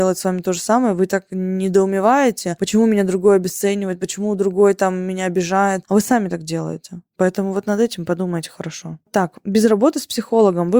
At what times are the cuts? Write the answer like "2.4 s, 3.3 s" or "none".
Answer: 7.1 s, 9.0 s